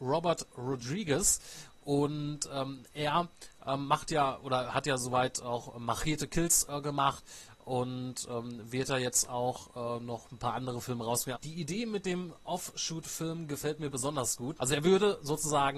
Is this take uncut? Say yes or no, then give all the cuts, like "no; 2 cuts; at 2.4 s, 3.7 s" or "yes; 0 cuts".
no; 2 cuts; at 11.3 s, 14.6 s